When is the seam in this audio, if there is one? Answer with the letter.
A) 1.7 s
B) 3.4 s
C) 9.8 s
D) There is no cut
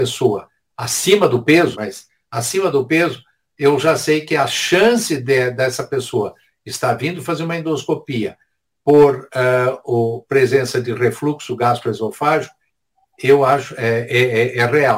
A